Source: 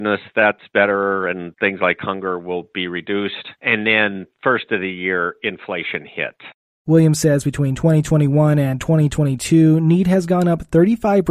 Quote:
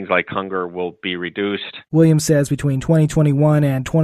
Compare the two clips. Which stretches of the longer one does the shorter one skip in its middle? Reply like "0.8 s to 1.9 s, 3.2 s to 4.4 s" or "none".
3.6 s to 6.8 s